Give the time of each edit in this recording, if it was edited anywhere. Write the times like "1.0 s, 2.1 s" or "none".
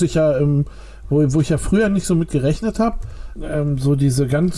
3.4 s